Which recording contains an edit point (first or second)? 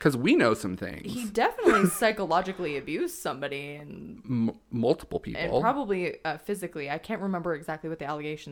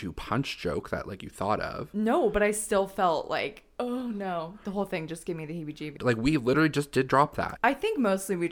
second